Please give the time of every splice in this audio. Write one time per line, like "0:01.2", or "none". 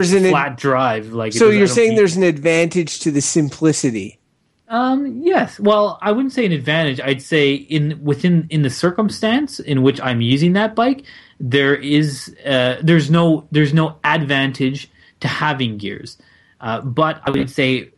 none